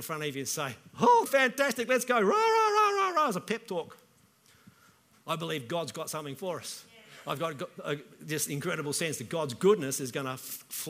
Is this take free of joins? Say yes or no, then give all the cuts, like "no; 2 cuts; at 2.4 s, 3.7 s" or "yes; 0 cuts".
no; 2 cuts; at 1.3 s, 5.1 s